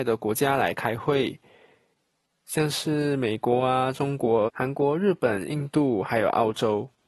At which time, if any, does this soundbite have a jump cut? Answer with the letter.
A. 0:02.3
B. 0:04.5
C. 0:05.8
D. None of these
B